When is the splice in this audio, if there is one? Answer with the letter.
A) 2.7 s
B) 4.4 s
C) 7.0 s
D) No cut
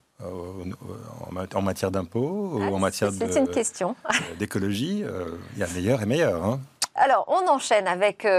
C